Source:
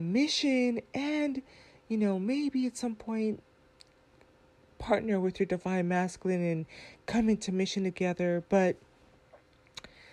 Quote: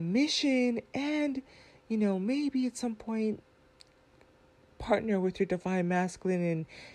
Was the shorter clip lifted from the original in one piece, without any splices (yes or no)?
yes